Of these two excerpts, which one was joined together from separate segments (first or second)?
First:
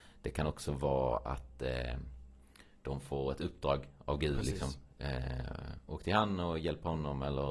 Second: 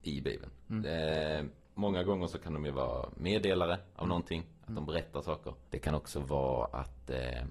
second